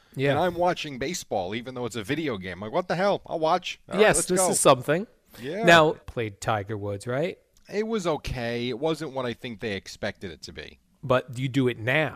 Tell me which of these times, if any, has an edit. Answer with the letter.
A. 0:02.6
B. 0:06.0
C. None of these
B